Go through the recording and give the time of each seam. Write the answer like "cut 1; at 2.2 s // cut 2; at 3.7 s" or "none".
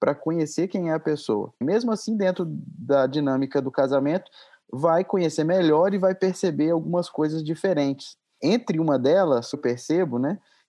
cut 1; at 1.6 s // cut 2; at 9.5 s